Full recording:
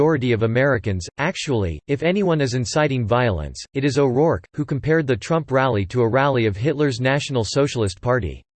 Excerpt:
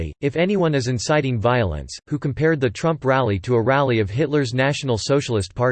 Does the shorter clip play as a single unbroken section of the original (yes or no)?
no